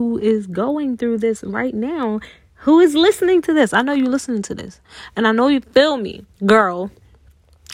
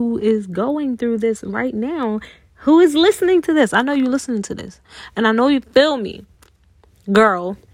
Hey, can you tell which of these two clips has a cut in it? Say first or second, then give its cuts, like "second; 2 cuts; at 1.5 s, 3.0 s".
first; 1 cut; at 6.3 s